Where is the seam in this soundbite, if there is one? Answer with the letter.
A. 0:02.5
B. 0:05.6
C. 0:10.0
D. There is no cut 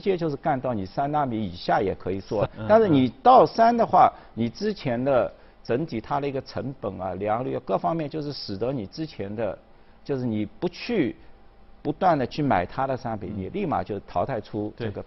A